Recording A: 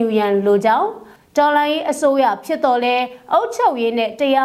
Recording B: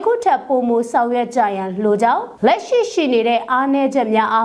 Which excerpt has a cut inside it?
B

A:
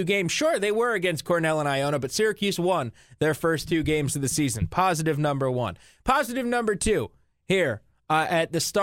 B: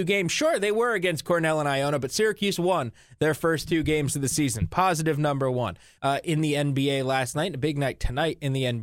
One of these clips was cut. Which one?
B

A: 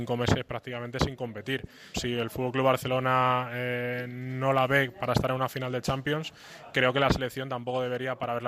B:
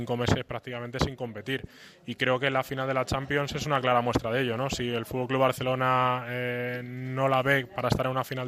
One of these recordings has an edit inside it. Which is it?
A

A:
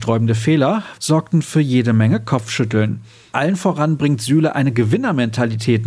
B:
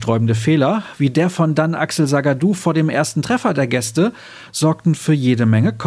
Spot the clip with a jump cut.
A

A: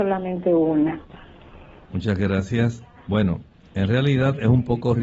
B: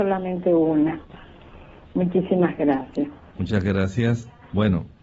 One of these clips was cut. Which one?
A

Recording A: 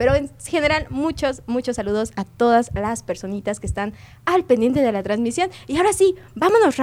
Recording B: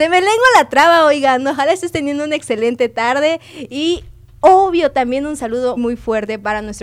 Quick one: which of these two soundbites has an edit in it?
B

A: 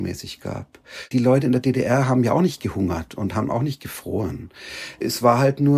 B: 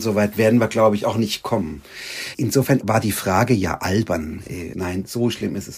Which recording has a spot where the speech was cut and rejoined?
B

